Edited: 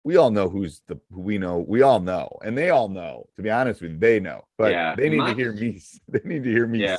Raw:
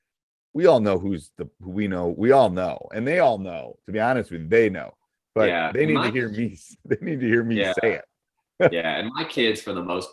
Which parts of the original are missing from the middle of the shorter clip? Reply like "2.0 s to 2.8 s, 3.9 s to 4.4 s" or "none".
5.0 s to 5.2 s